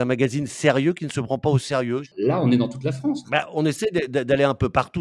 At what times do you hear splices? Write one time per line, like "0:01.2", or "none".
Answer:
0:02.0
0:03.2

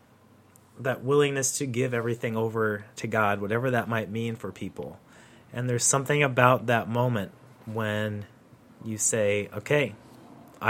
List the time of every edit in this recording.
none

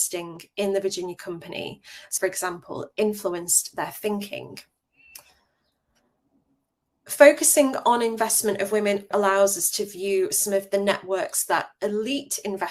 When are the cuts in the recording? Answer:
0:02.2
0:09.1

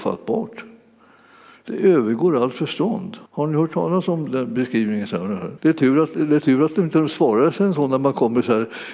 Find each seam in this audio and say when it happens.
0:03.3
0:05.6

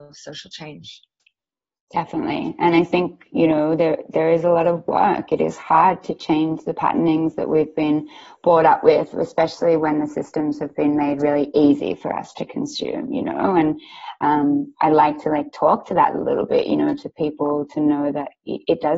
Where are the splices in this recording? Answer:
none

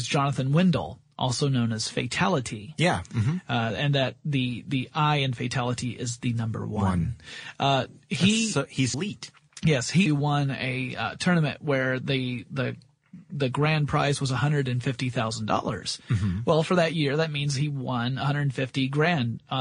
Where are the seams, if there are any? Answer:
0:08.9
0:10.1

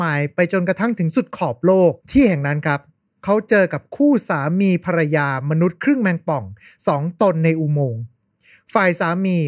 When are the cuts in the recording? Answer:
0:02.0

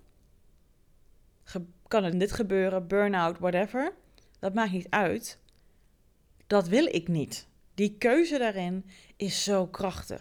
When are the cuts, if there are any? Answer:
0:02.1

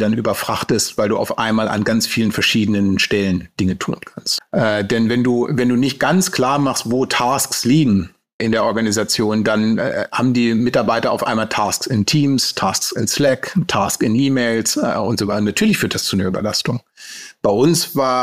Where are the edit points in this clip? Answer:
0:04.4
0:08.4

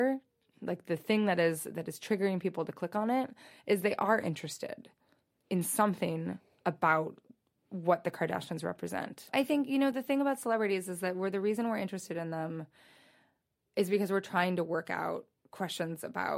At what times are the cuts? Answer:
none

